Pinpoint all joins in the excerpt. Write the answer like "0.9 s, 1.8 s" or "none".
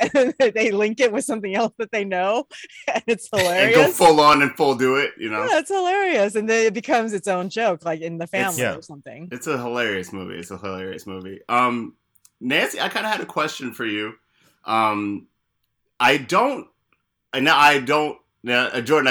none